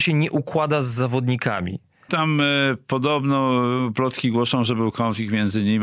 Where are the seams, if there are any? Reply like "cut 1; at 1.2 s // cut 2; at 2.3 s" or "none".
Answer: cut 1; at 2.1 s